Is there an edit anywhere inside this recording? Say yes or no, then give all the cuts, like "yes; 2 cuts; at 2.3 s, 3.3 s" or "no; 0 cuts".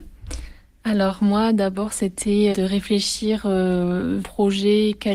yes; 2 cuts; at 2.5 s, 4.2 s